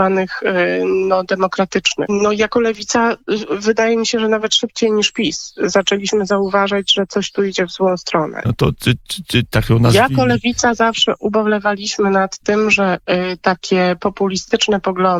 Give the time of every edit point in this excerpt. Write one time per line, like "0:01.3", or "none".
0:02.1
0:08.4